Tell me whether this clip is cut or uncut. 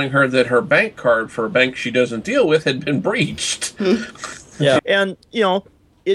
cut